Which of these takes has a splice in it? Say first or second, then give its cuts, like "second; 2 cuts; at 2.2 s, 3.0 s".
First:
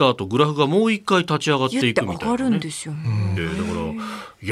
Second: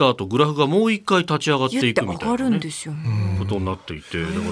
first; 1 cut; at 3.4 s